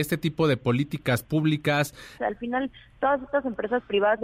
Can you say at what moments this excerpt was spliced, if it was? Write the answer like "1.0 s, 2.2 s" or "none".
2.2 s